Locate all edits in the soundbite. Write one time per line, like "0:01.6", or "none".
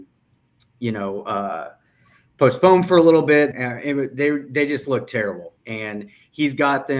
0:03.5
0:05.6